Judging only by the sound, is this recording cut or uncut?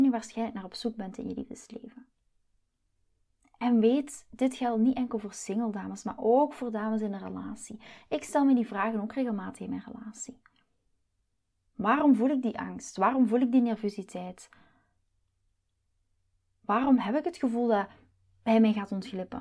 uncut